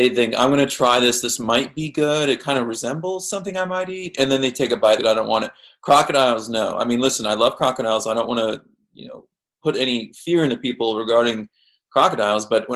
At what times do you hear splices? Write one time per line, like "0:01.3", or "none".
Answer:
0:05.0